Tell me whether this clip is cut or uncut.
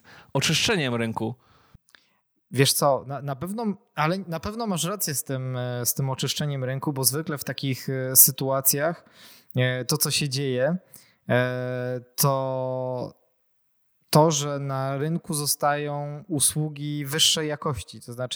uncut